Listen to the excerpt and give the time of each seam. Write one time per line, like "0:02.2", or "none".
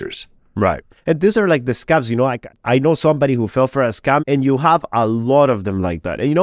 0:00.9
0:04.2